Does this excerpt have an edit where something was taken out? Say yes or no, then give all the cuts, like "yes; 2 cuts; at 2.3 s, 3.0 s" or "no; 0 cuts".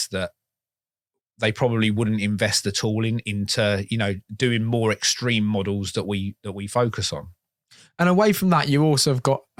no; 0 cuts